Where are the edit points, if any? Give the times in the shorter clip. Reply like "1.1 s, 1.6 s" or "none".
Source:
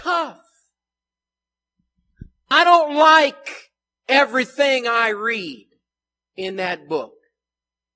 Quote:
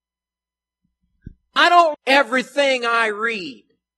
1.9 s